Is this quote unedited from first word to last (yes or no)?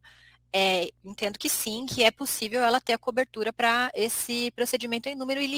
yes